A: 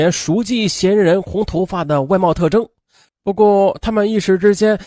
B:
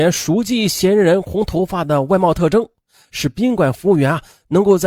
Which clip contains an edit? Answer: A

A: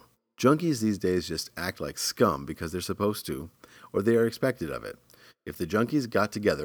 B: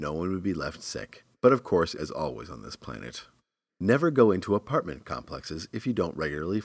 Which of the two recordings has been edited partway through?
B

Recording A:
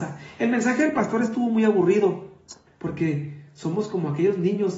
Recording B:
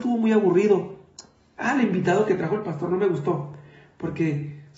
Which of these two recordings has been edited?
A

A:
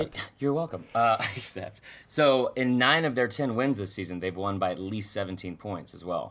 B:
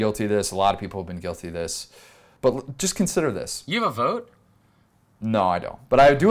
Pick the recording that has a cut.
B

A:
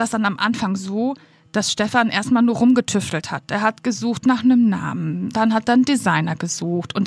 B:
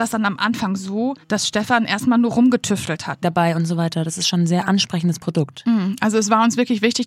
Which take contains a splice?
B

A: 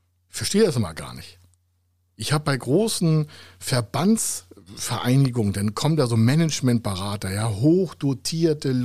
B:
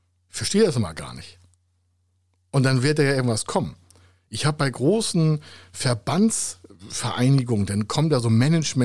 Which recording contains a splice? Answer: A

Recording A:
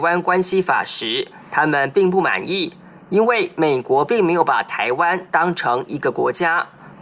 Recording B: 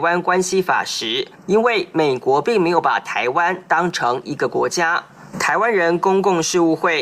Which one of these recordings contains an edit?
B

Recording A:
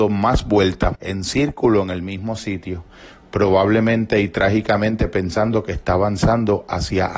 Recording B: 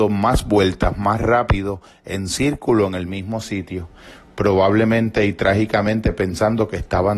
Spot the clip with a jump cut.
A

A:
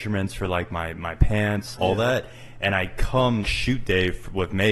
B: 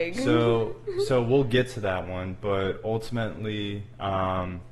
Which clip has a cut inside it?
A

